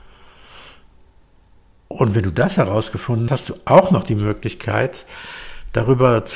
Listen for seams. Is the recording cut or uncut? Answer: cut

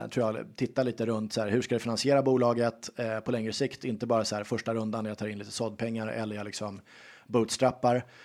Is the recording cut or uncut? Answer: uncut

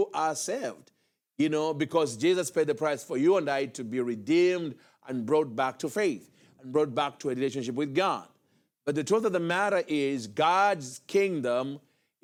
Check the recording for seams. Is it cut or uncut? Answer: uncut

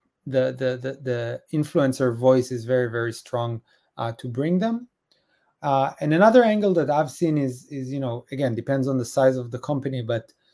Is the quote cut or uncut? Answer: uncut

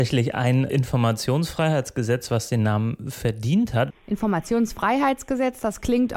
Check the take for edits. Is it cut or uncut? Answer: cut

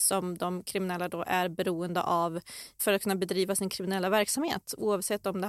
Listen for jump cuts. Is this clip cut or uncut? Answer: uncut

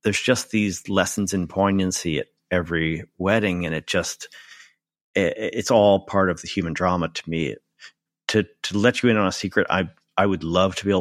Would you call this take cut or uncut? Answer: uncut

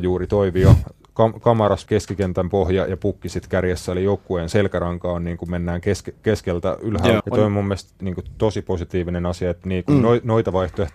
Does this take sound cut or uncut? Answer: cut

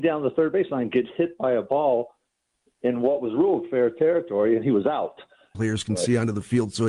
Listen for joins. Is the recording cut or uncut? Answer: cut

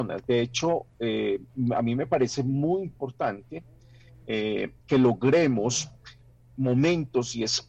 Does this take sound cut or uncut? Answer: uncut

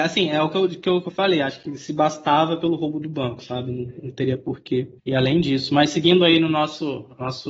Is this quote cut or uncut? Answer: cut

